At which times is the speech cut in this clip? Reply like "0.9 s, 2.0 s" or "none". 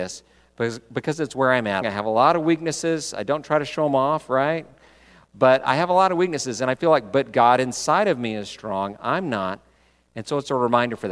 1.8 s